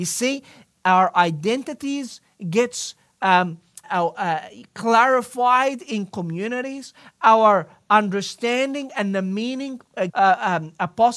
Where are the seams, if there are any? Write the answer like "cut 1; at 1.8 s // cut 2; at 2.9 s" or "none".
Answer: cut 1; at 3.8 s // cut 2; at 10.1 s